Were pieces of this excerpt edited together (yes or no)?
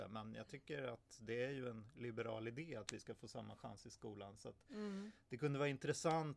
no